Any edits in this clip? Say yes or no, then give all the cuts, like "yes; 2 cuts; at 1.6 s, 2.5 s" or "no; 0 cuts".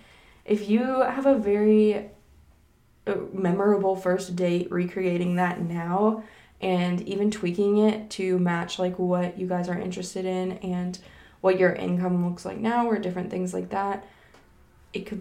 no; 0 cuts